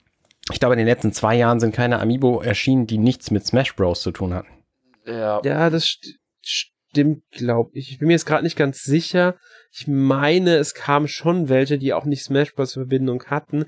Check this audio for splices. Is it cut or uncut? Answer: uncut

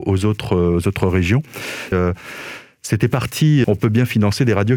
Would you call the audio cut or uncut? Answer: cut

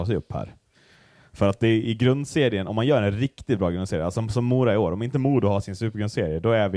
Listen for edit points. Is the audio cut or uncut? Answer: uncut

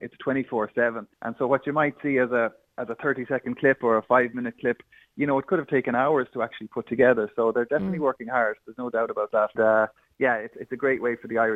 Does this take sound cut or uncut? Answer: cut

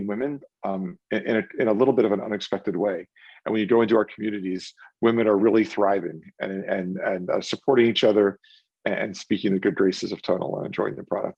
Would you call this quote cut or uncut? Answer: uncut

